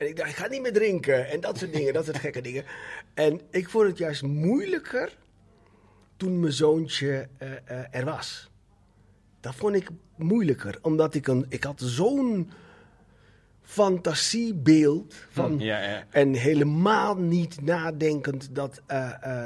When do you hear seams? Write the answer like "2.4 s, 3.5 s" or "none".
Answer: 15.6 s

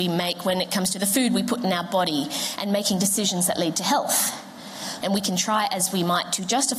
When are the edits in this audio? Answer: 5.0 s

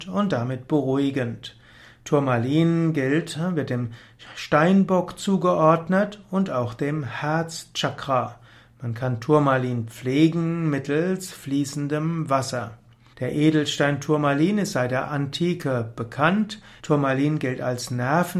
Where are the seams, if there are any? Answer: 13.1 s, 16.8 s

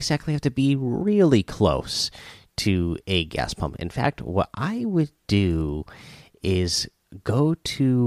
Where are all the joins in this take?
none

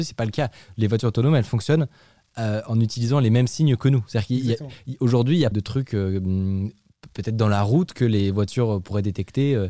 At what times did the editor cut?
5.5 s

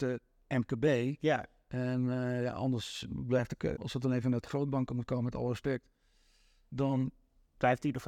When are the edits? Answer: 3.8 s

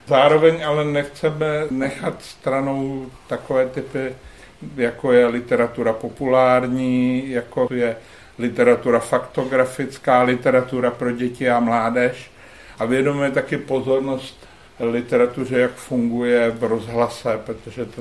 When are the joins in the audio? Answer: none

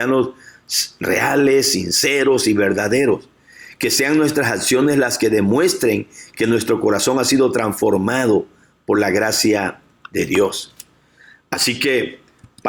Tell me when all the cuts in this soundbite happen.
none

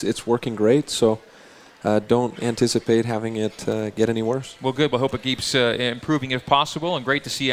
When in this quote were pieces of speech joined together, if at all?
none

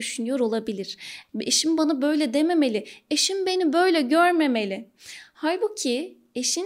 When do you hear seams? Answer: 1.3 s

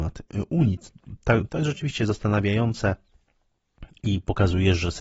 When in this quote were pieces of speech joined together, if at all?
1.5 s

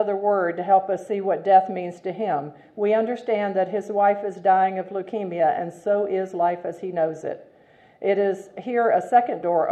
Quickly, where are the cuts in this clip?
none

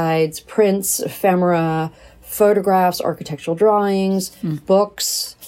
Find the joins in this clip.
none

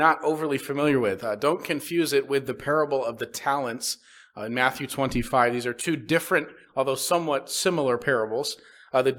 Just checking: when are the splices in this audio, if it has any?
none

